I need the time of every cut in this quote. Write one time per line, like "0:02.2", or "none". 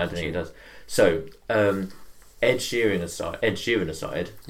none